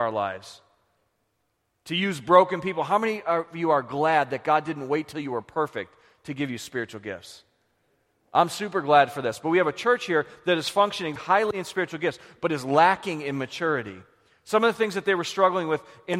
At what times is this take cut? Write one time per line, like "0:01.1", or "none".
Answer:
0:11.2